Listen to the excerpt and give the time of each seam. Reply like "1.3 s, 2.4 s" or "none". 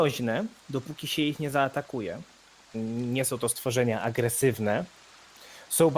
2.7 s